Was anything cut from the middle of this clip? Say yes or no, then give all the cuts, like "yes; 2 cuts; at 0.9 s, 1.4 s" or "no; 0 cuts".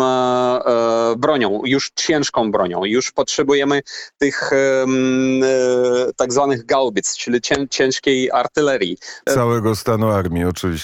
yes; 1 cut; at 9.3 s